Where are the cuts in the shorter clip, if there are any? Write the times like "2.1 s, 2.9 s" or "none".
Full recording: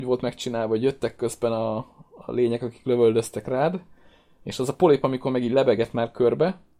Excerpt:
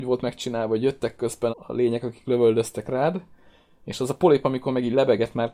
1.5 s